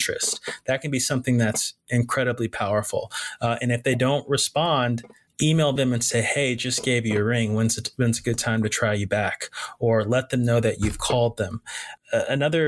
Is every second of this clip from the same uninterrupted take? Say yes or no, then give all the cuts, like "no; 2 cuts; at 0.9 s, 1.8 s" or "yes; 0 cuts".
yes; 0 cuts